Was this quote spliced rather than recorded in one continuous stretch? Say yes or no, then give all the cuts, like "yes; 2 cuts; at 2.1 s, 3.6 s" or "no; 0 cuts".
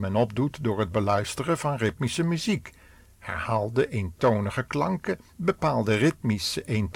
yes; 1 cut; at 5.3 s